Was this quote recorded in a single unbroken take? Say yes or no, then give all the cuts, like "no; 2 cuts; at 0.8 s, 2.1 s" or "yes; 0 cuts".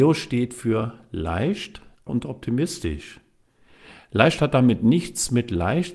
no; 1 cut; at 2.1 s